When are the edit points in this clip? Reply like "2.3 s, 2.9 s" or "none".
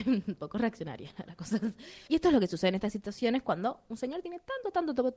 2.1 s